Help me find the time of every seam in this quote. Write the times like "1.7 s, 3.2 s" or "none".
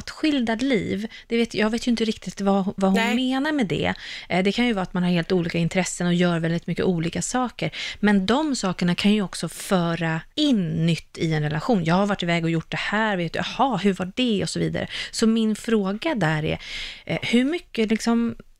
10.3 s